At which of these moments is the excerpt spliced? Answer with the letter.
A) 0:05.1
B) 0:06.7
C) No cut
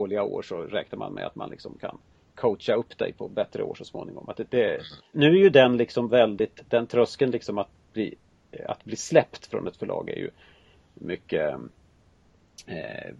A